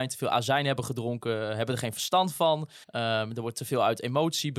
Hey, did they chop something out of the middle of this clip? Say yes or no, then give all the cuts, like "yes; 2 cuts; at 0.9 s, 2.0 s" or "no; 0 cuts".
yes; 1 cut; at 2.8 s